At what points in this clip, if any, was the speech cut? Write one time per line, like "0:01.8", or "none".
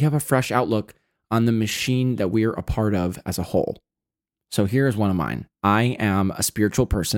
0:04.4
0:05.5